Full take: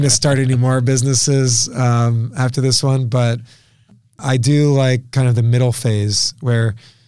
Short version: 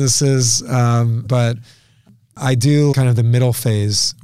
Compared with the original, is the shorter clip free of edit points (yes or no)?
no